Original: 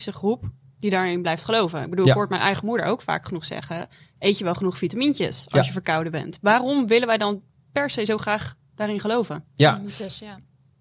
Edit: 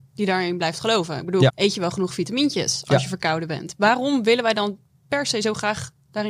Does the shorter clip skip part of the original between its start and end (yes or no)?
yes